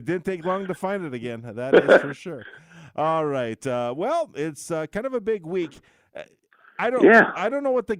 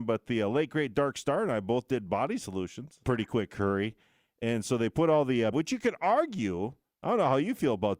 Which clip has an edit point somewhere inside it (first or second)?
second